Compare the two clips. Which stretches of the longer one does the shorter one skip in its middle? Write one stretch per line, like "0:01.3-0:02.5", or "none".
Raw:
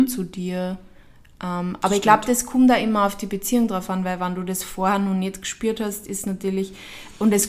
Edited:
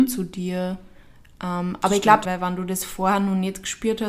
0:02.3-0:04.0